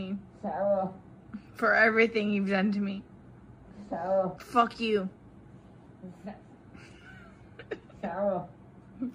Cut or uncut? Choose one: cut